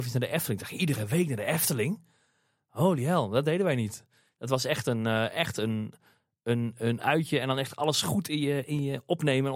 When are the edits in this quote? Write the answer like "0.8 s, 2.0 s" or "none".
none